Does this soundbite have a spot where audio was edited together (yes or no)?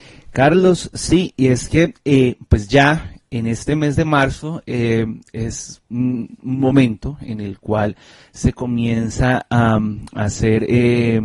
no